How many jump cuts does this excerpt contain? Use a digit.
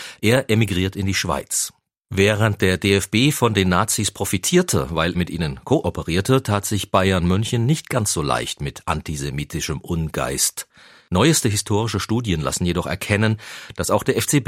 1